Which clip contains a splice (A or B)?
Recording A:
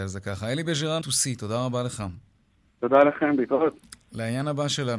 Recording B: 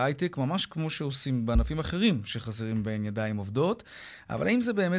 A